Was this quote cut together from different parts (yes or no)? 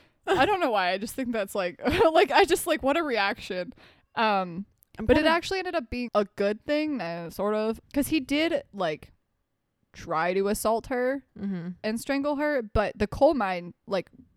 yes